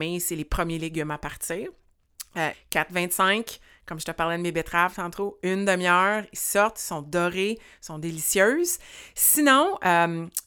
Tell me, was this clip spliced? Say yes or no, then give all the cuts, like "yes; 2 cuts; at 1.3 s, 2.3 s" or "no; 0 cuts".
yes; 1 cut; at 2.5 s